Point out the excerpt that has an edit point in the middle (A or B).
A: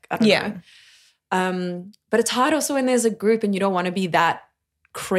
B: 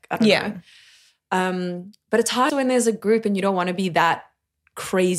B